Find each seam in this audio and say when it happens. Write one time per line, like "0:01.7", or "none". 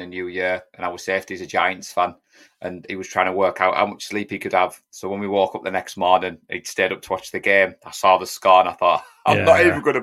none